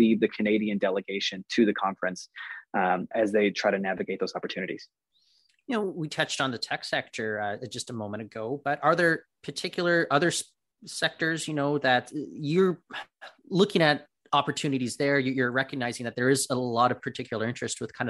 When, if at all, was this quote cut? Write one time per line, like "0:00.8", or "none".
0:03.1